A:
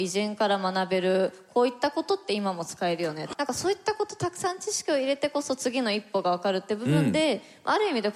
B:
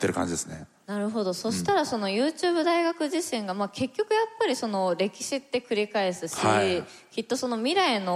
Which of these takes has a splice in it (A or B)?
A